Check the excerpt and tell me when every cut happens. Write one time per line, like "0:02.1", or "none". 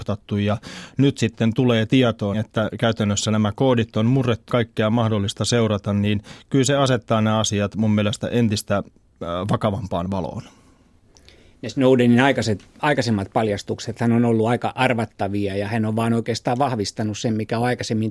0:02.3
0:04.5